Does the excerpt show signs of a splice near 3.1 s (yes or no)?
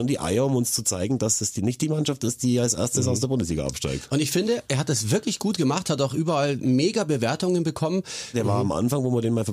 no